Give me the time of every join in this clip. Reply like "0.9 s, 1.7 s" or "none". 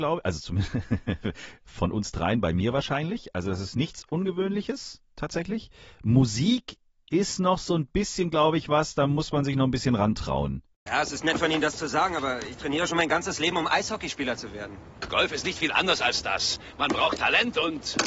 10.9 s